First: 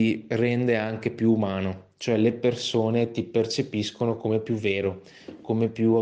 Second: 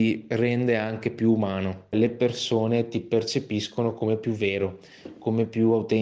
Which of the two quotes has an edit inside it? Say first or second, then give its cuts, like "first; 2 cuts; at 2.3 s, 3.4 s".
second; 1 cut; at 1.9 s